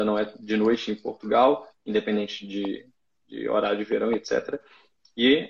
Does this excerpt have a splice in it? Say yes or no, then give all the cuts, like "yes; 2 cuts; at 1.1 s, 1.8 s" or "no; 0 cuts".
no; 0 cuts